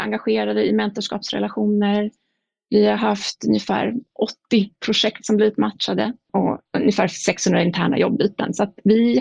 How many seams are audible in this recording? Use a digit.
0